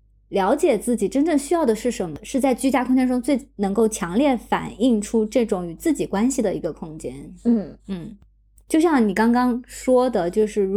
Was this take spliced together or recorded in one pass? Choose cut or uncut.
uncut